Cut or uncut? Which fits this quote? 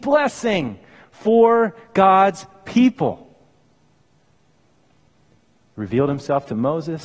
uncut